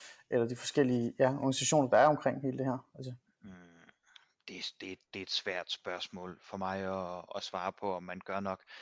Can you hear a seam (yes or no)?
no